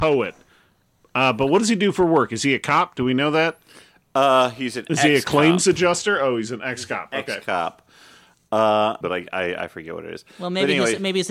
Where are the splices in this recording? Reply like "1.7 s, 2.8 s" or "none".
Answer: 9.0 s